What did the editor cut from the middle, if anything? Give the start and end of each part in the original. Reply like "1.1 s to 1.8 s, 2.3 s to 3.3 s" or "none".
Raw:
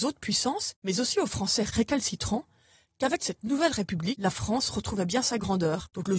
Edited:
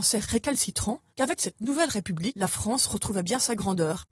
2.5 s to 2.9 s